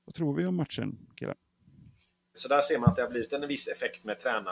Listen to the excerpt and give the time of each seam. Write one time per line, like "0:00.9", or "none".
0:02.3